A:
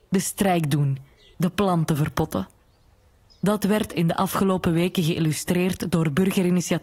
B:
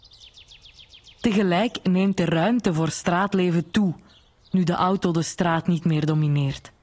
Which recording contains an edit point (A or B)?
A